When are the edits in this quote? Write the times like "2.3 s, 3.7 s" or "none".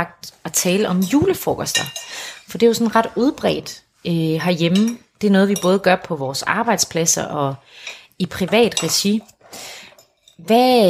none